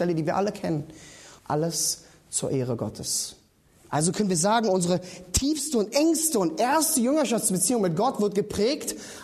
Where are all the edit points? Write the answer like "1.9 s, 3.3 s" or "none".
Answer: 1.4 s